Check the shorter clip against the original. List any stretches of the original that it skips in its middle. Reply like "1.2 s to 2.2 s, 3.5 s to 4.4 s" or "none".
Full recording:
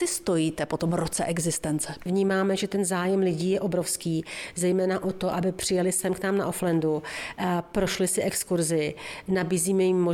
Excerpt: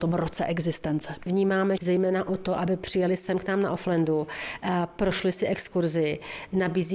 2.6 s to 4.5 s